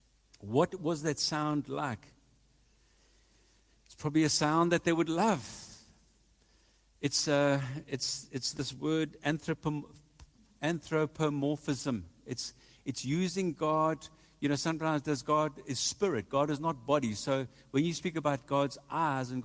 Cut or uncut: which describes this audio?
uncut